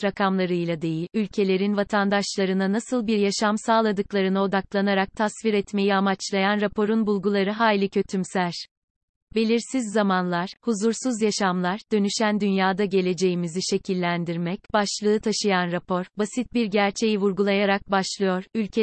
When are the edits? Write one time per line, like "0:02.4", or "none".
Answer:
none